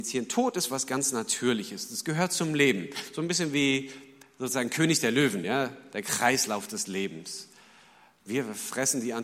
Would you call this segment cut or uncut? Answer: uncut